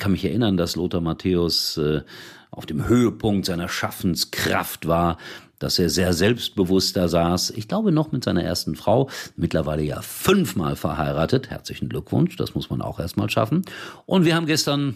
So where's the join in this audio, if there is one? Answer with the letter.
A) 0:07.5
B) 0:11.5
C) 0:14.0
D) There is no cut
D